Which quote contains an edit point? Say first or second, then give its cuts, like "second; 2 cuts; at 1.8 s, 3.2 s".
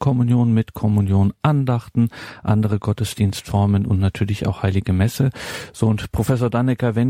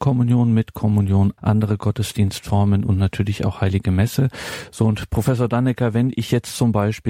second; 1 cut; at 1.4 s